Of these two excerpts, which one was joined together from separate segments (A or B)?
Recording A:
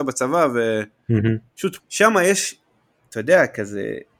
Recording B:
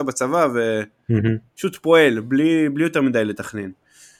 A